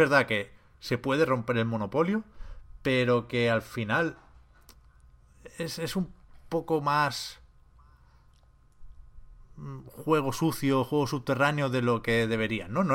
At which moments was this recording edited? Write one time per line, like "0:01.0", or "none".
none